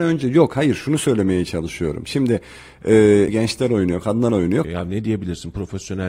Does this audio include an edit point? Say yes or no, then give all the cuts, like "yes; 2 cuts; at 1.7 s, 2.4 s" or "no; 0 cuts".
yes; 2 cuts; at 3.3 s, 4.6 s